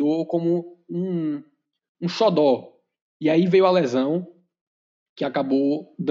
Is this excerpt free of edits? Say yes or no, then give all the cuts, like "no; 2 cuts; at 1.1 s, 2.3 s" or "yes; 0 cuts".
yes; 0 cuts